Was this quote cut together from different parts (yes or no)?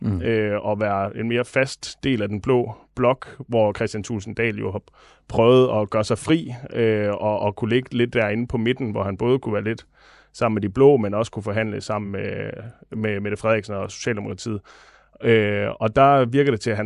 no